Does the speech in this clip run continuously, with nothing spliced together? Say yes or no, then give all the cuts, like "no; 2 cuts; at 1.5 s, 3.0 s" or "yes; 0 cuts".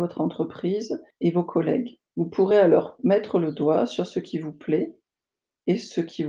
yes; 0 cuts